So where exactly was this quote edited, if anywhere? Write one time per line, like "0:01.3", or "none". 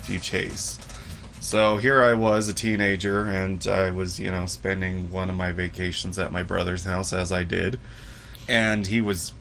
0:08.5